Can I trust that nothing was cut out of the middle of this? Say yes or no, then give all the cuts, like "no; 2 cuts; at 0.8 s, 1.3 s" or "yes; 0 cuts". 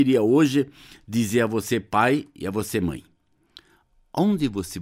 yes; 0 cuts